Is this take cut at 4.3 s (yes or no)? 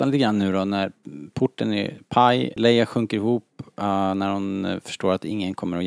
no